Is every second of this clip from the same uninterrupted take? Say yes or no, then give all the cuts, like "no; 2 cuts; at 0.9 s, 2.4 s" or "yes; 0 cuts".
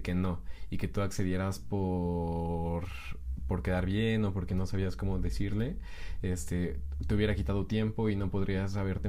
yes; 0 cuts